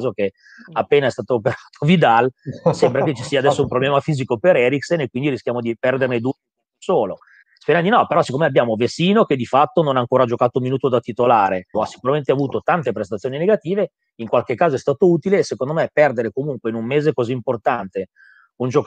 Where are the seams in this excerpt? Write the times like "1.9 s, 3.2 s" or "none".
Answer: 7.4 s, 11.7 s